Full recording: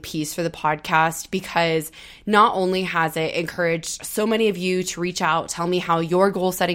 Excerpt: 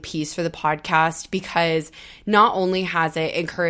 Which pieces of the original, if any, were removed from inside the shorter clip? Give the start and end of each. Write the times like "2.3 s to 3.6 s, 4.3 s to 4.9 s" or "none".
none